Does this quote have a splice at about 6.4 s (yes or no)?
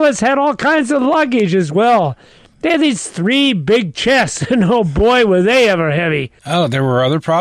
yes